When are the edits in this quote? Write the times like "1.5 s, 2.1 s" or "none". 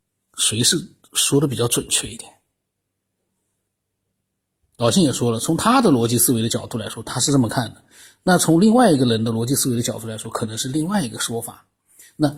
none